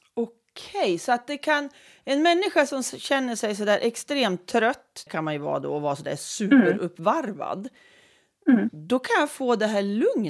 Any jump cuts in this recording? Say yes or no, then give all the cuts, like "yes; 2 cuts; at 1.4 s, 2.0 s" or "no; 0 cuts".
yes; 1 cut; at 5.1 s